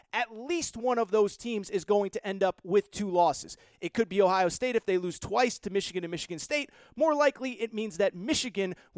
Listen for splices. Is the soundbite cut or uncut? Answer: uncut